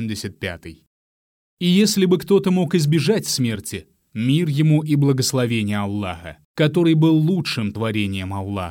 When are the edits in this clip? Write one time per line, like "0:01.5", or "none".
0:04.1
0:06.4